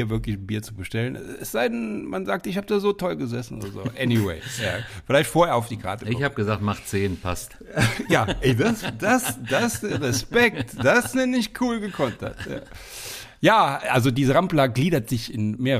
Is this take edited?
no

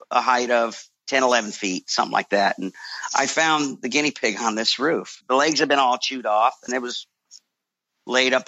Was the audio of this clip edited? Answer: yes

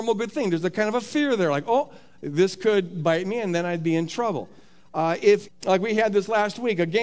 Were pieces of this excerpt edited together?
yes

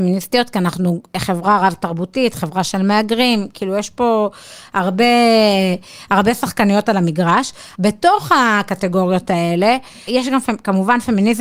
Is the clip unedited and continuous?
no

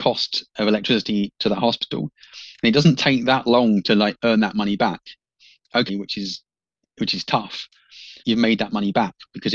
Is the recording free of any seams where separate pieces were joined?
no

